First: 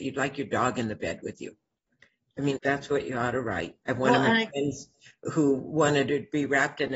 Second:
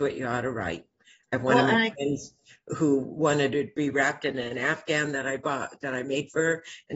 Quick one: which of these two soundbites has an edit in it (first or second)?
first